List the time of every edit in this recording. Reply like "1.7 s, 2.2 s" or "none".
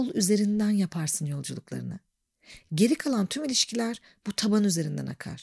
none